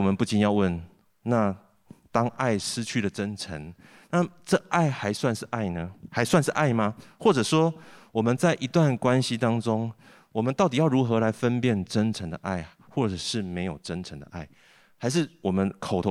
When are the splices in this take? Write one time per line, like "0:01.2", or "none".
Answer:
none